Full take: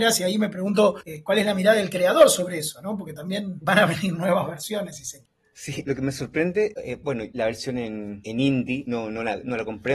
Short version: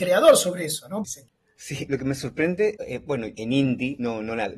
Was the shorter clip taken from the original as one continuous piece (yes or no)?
no